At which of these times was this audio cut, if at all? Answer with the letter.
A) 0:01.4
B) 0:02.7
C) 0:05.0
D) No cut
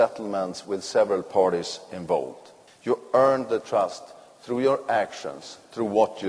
B